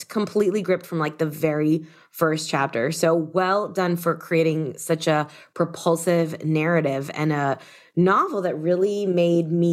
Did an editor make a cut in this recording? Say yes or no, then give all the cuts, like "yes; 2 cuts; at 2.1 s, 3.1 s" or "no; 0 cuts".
no; 0 cuts